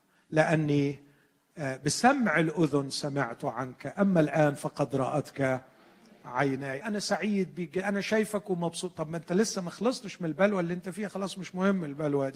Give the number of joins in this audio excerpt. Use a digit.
1